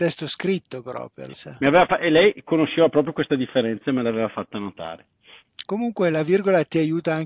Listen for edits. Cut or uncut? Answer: cut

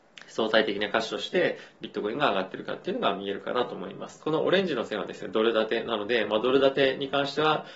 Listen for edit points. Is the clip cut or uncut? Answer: cut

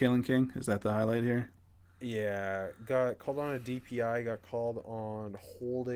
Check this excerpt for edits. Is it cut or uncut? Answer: uncut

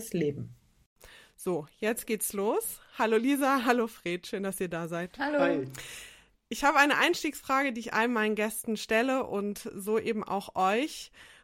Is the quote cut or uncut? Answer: uncut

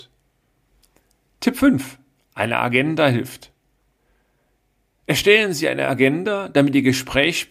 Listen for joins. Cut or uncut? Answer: uncut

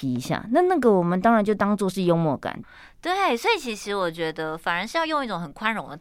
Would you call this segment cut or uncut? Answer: cut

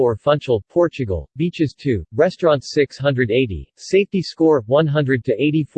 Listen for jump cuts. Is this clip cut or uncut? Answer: cut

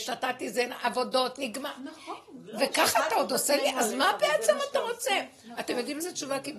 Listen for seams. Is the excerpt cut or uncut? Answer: uncut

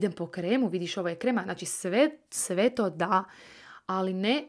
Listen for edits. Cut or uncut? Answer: uncut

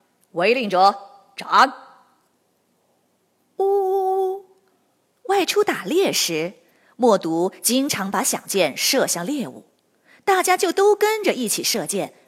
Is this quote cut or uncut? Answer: uncut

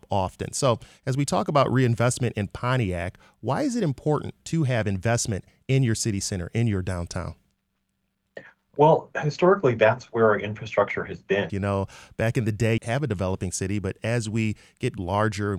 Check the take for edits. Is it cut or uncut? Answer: cut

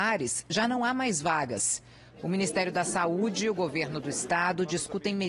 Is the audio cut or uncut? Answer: uncut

